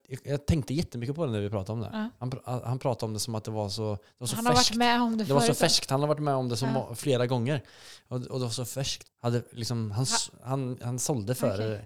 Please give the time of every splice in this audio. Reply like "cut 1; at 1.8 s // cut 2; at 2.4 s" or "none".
cut 1; at 9.0 s